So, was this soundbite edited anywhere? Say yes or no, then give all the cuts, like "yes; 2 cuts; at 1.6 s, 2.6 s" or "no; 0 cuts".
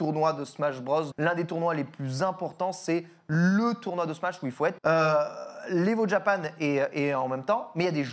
yes; 2 cuts; at 1.1 s, 4.8 s